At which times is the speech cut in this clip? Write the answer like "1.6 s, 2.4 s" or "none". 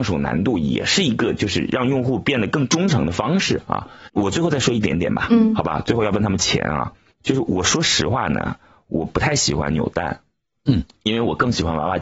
none